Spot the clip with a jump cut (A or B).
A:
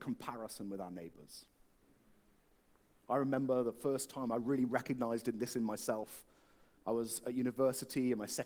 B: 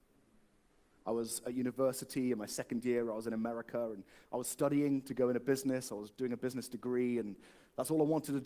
B